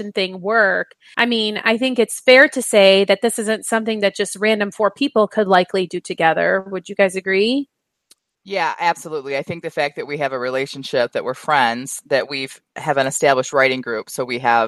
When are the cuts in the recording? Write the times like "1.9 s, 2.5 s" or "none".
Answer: 1.1 s